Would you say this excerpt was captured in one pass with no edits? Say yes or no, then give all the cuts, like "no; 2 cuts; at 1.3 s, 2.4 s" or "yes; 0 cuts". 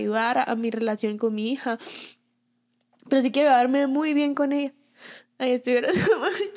yes; 0 cuts